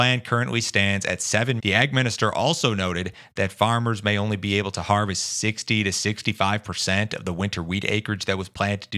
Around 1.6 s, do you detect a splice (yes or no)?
yes